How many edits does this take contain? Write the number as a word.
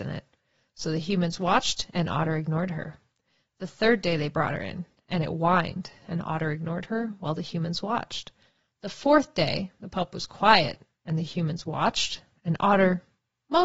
zero